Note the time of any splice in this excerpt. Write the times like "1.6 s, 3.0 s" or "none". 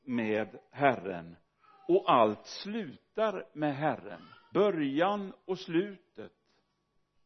4.5 s